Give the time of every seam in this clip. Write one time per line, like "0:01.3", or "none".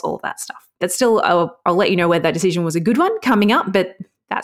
none